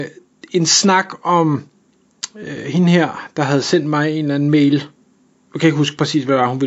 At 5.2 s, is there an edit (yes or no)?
no